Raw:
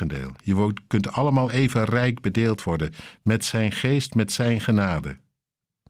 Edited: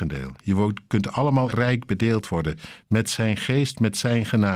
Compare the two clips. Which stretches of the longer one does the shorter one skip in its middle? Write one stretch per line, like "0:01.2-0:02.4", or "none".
0:01.5-0:01.9